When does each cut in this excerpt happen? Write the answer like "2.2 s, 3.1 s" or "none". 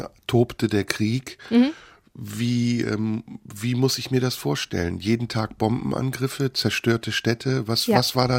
none